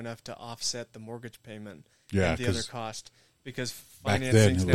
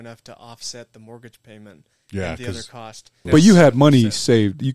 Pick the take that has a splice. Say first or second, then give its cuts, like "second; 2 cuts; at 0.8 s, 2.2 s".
second; 1 cut; at 3.3 s